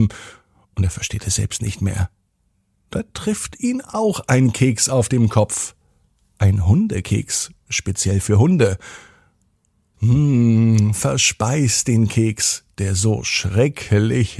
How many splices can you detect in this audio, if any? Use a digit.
1